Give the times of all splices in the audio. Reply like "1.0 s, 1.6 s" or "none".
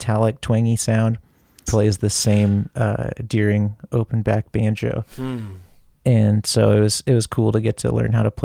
1.7 s